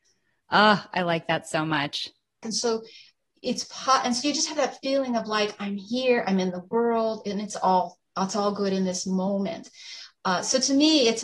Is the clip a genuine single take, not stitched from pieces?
no; 1 cut; at 2.4 s

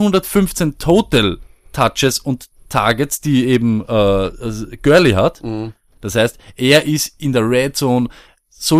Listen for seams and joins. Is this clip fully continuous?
no; 2 cuts; at 2.6 s, 6.0 s

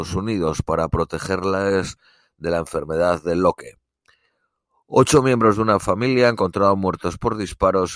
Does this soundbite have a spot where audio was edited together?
no; 0 cuts

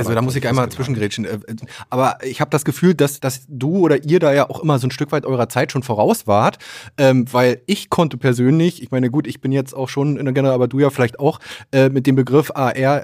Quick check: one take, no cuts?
no; 2 cuts; at 1.6 s, 3.2 s

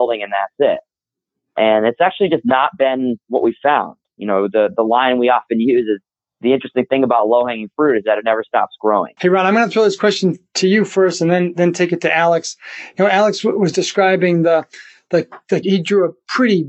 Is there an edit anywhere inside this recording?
yes; 2 cuts; at 9.2 s, 15.6 s

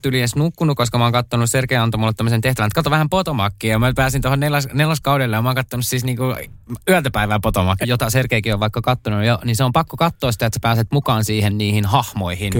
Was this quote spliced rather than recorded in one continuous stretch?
yes; 1 cut; at 7.8 s

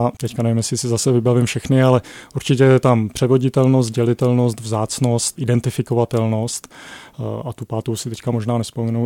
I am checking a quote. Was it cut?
yes; 1 cut; at 5.4 s

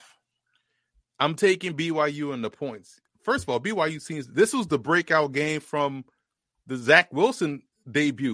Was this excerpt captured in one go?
yes; 0 cuts

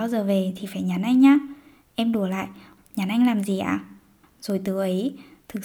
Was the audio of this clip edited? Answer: yes; 2 cuts; at 2.8 s, 4.2 s

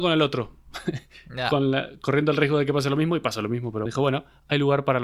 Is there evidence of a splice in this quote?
yes; 1 cut; at 3.9 s

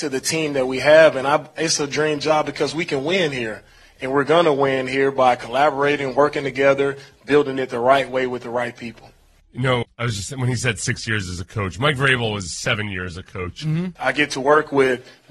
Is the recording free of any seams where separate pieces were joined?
no; 2 cuts; at 9.8 s, 14.0 s

